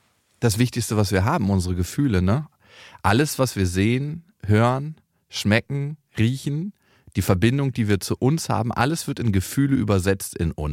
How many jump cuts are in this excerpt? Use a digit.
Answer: 0